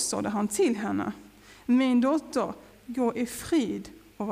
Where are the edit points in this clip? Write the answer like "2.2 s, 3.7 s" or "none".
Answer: 2.7 s